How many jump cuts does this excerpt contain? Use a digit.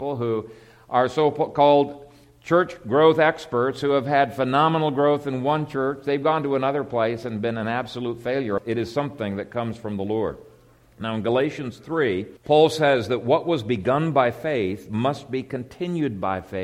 2